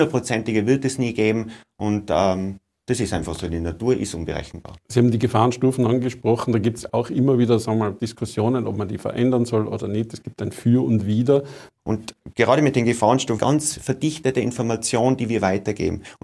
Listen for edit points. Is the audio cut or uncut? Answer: cut